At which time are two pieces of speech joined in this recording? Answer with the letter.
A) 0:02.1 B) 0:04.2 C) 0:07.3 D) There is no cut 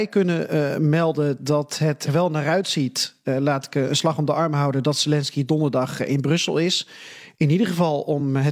A